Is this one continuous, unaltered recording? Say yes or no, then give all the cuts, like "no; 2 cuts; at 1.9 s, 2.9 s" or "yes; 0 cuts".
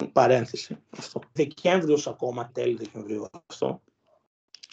no; 2 cuts; at 1.4 s, 2.5 s